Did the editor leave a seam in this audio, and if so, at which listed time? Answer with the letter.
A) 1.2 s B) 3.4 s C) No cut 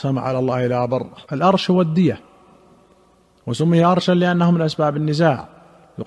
A